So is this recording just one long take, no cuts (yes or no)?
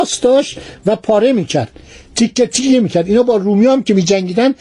yes